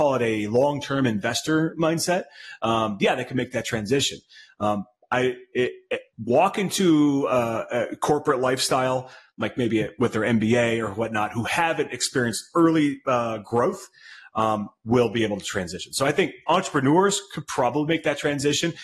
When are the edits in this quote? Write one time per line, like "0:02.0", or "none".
0:06.1

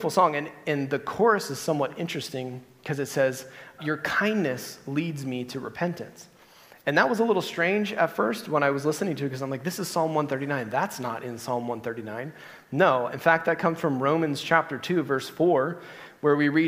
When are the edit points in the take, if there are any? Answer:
0:03.8

